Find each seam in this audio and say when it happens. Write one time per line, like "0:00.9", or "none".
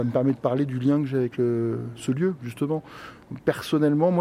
none